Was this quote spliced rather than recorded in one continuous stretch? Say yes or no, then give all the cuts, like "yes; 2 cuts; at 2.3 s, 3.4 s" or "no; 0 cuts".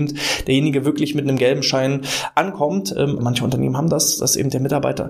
yes; 1 cut; at 3.2 s